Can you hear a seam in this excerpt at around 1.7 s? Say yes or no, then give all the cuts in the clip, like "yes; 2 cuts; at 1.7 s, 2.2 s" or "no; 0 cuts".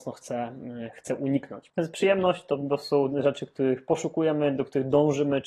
yes; 1 cut; at 1.7 s